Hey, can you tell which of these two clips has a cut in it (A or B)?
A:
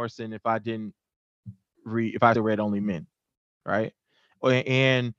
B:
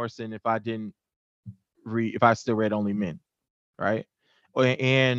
A